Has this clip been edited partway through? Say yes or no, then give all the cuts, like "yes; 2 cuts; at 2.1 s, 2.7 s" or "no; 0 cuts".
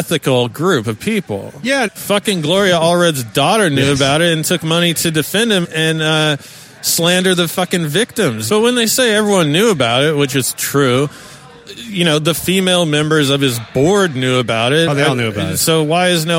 yes; 3 cuts; at 1.9 s, 5.6 s, 8.5 s